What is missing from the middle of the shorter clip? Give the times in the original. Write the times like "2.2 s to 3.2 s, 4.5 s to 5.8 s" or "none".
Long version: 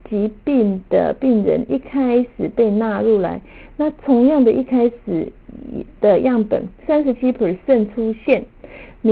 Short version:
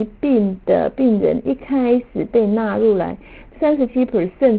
3.7 s to 6.8 s